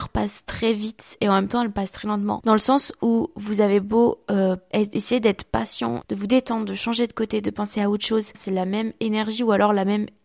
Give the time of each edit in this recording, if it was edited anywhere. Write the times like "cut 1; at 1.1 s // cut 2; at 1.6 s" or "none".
cut 1; at 6.0 s // cut 2; at 8.3 s